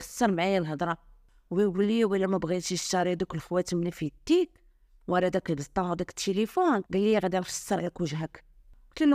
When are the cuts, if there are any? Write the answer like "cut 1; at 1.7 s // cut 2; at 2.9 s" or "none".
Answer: cut 1; at 6.9 s